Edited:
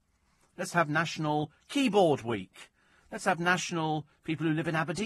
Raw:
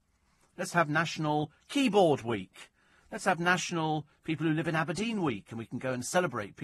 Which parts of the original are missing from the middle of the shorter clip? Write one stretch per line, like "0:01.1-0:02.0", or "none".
none